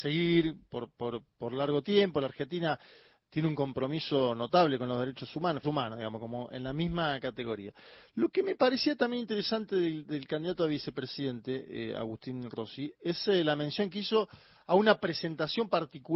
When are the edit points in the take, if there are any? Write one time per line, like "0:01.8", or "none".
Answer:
0:05.6